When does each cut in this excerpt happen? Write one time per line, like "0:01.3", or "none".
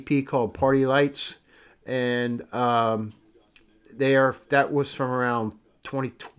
none

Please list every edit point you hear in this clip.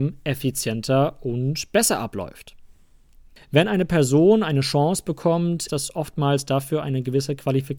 0:03.4
0:05.7

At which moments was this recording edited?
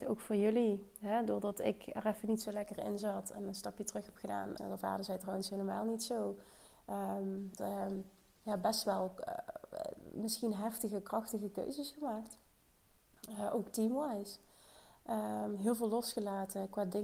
0:04.6
0:07.6

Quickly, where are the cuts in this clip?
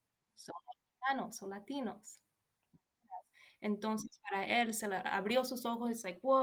none

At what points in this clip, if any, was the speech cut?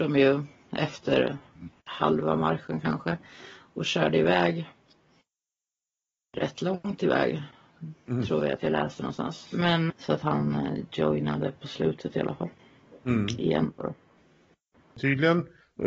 0:09.9

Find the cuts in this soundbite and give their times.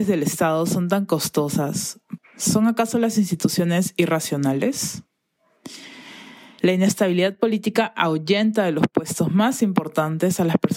0:02.2
0:06.6

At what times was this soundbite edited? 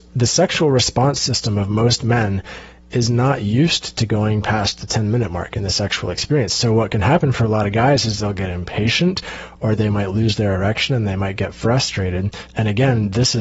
0:12.5

